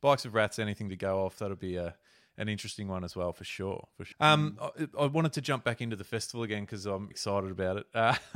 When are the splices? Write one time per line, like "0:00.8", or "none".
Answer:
0:04.1
0:07.1